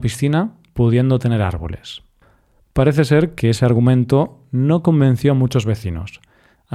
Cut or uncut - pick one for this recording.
uncut